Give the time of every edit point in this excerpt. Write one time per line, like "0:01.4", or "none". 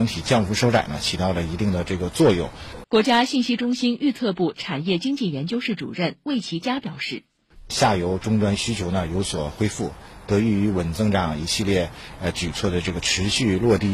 0:02.8